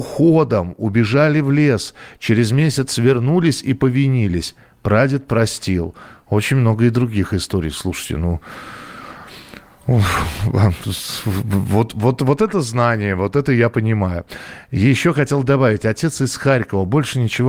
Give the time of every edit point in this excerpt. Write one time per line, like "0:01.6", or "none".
none